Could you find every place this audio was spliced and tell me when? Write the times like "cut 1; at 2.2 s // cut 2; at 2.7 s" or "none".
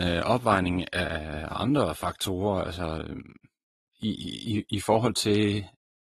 none